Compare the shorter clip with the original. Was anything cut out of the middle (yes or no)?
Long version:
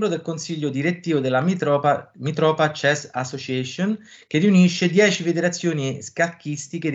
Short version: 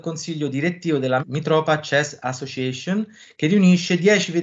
yes